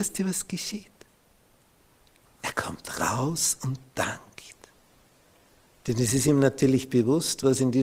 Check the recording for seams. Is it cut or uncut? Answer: uncut